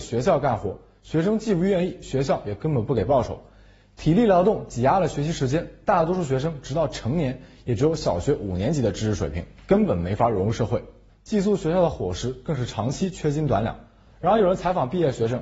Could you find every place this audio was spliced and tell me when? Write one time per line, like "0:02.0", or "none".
0:11.1
0:14.1